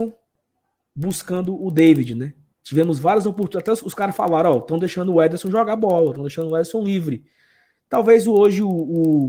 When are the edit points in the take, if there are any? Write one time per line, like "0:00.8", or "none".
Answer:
none